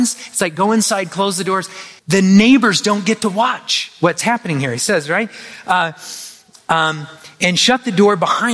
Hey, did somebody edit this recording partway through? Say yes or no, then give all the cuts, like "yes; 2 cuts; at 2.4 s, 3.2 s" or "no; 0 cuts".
yes; 1 cut; at 2.0 s